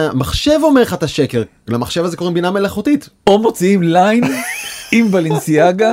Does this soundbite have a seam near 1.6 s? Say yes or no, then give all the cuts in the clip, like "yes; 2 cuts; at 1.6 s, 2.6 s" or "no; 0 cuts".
no; 1 cut; at 3.2 s